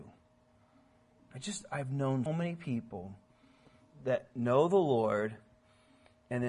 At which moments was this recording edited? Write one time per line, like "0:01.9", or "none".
0:01.2
0:02.3